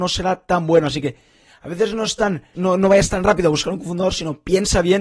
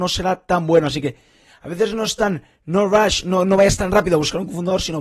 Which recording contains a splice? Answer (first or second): first